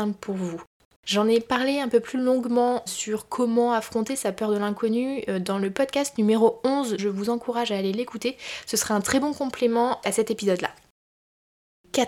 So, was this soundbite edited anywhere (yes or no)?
yes